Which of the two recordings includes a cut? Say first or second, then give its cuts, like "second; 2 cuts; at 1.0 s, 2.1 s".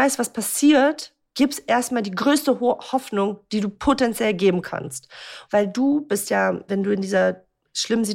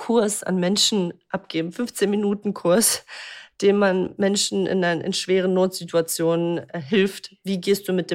first; 2 cuts; at 5.5 s, 6.7 s